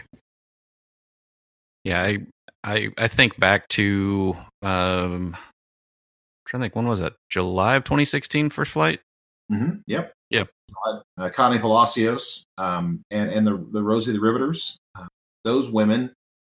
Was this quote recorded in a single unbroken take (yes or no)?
no